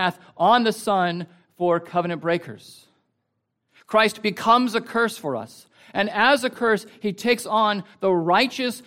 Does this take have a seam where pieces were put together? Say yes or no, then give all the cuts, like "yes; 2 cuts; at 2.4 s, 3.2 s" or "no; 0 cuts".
no; 0 cuts